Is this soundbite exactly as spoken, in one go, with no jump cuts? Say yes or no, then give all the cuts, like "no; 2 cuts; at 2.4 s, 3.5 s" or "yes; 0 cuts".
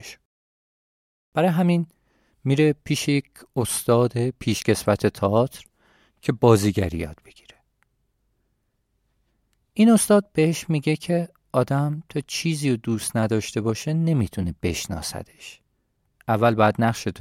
yes; 0 cuts